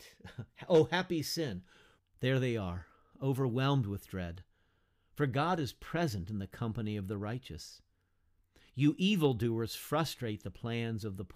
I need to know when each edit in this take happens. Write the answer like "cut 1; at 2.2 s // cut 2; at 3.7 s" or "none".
cut 1; at 2.0 s